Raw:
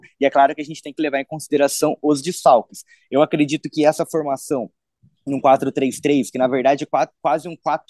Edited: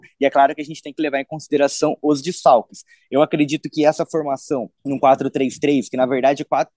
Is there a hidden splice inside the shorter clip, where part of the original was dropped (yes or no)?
yes